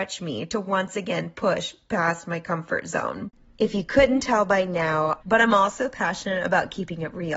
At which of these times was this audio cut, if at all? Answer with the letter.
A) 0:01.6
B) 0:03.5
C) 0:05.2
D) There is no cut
C